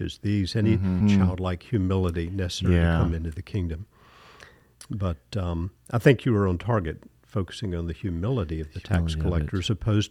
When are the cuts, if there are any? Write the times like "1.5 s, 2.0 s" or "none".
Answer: 1.0 s